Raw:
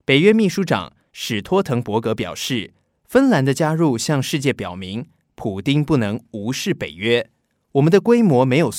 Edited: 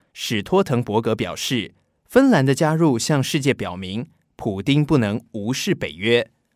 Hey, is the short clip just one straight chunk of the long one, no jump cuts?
yes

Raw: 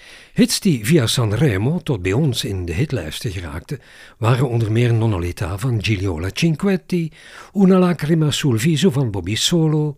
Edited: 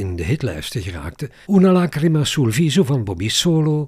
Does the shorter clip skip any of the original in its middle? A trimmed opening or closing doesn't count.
yes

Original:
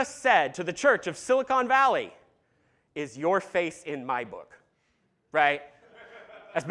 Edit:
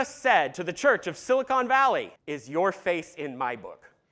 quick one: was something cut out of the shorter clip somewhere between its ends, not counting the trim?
yes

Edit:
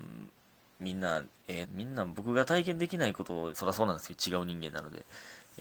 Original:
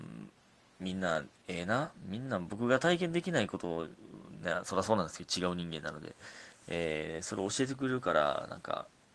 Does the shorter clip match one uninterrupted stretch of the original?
no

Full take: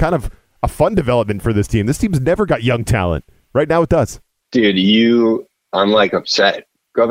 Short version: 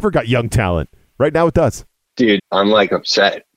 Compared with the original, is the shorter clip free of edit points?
no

